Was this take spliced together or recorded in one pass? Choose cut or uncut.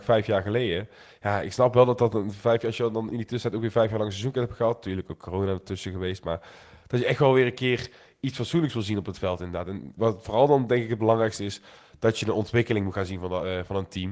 cut